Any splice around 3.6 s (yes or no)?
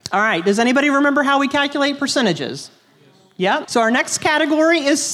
yes